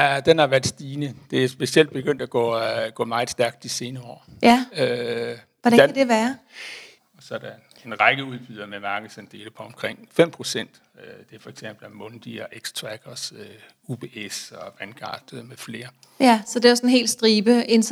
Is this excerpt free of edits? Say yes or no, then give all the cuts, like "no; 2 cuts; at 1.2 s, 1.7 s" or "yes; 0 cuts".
no; 1 cut; at 7.0 s